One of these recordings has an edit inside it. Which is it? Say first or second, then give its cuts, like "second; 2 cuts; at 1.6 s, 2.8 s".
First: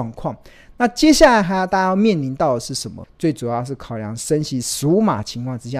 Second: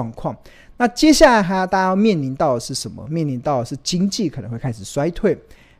first; 1 cut; at 3.0 s